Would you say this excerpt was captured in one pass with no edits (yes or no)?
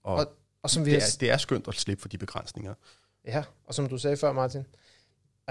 yes